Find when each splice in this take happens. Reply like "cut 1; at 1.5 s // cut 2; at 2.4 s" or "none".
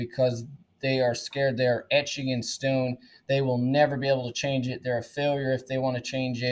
none